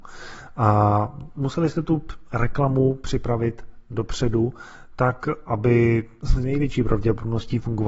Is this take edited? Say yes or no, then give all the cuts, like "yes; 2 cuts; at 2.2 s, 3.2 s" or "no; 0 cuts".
no; 0 cuts